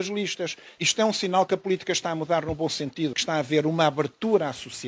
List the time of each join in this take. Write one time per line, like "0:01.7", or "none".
0:03.1